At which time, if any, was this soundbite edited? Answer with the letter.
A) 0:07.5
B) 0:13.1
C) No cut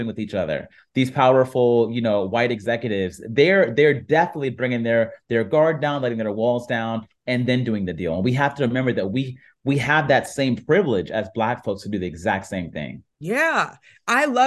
B